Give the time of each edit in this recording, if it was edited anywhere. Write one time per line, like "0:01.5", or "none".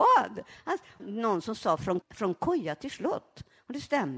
0:01.0
0:02.0